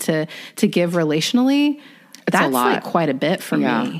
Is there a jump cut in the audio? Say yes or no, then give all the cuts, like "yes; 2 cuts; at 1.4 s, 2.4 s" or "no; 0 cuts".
no; 0 cuts